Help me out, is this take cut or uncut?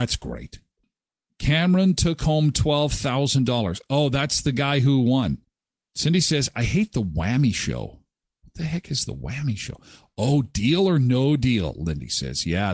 uncut